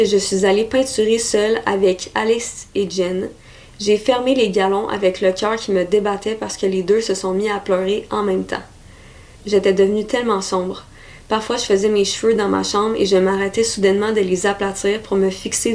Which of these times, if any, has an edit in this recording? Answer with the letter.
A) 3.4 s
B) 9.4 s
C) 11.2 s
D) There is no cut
B